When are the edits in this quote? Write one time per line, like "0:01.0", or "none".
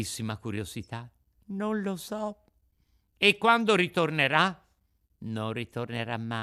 none